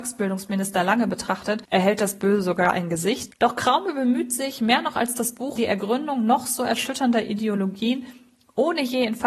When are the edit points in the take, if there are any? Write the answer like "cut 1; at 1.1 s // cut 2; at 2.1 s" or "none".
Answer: cut 1; at 5.6 s